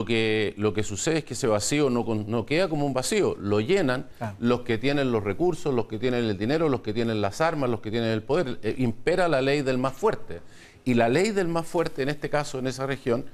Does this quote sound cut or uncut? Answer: uncut